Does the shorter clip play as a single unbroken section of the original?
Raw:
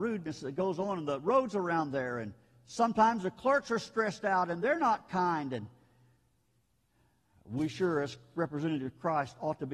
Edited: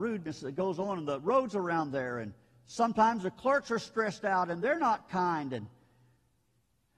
yes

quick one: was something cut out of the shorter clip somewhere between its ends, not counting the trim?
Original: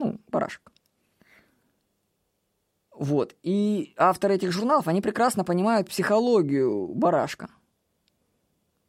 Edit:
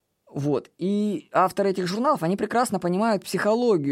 no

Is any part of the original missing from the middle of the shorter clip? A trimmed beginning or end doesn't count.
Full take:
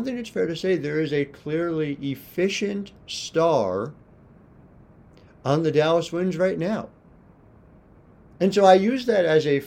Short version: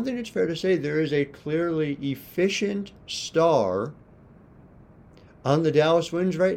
no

